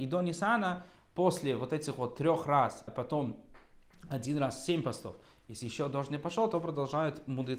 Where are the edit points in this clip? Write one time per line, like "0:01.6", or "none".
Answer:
0:02.9